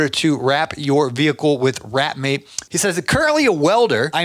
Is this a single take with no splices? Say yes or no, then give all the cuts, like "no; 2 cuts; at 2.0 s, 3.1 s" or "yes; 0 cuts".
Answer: no; 1 cut; at 2.7 s